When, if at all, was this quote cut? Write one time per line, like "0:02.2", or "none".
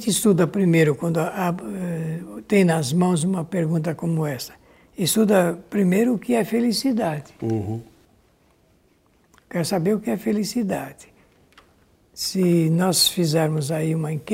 none